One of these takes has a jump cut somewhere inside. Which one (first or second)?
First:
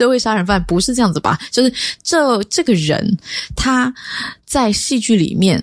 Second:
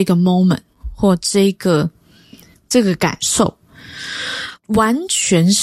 second